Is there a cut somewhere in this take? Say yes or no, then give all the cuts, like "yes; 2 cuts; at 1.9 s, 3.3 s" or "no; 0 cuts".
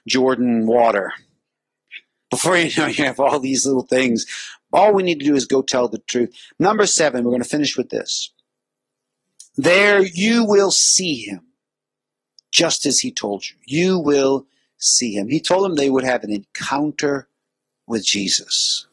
no; 0 cuts